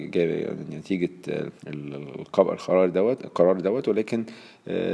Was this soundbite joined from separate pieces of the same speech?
yes; 1 cut; at 1.6 s

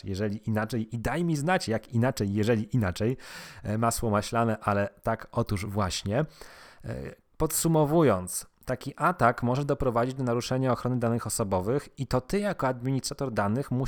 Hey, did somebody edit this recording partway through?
no; 0 cuts

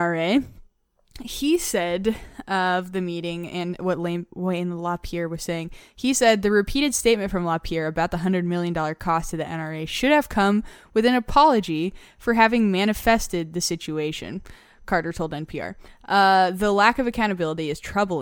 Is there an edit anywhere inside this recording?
no; 0 cuts

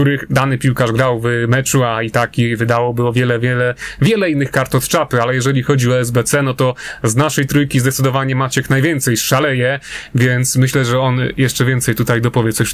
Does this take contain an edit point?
no; 0 cuts

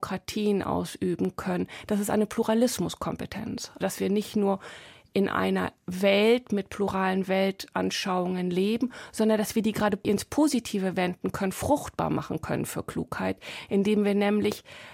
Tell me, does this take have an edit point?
no; 0 cuts

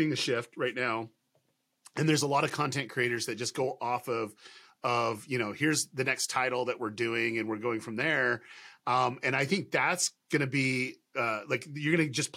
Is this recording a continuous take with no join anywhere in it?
yes; 0 cuts

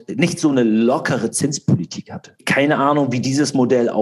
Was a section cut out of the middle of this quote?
yes; 1 cut; at 2.4 s

